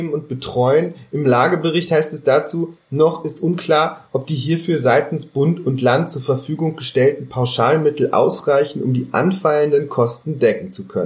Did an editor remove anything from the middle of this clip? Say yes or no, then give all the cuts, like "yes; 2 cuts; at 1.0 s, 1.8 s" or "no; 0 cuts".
no; 0 cuts